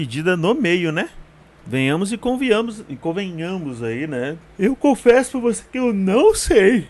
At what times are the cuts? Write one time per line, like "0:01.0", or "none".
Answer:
0:01.6
0:04.4